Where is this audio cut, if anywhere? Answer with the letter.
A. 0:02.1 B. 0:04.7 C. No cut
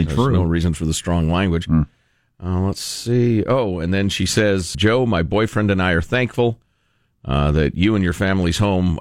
B